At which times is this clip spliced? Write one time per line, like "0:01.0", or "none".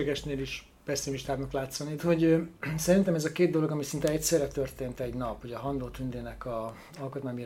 0:02.0